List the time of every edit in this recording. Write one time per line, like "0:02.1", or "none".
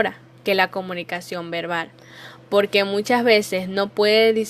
none